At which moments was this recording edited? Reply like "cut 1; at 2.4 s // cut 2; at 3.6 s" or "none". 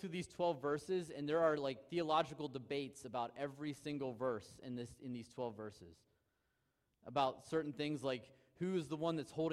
none